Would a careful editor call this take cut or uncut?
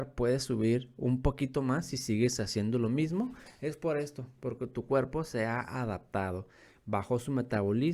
uncut